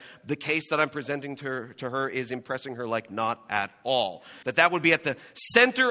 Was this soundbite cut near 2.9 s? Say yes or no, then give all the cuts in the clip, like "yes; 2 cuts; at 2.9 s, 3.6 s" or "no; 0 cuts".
no; 1 cut; at 4.4 s